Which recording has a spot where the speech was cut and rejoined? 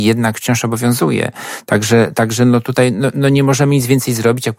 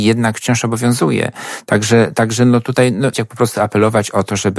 second; 1 cut; at 3.1 s

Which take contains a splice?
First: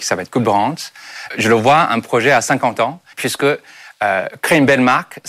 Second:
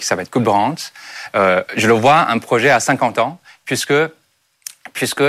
first; 2 cuts; at 1.3 s, 3.1 s

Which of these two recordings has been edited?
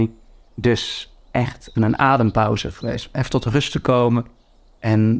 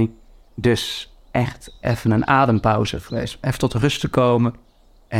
first; 1 cut; at 1.8 s

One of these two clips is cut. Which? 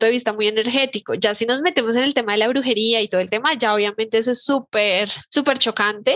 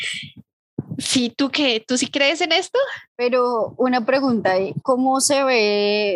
second; 2 cuts; at 3.1 s, 4.8 s

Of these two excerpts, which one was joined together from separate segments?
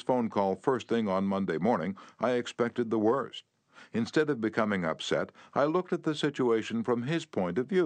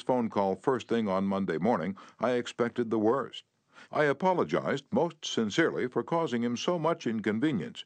second; 1 cut; at 3.8 s

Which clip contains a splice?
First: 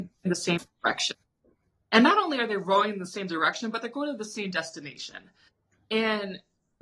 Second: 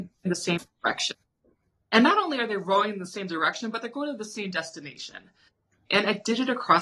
second; 1 cut; at 5.9 s

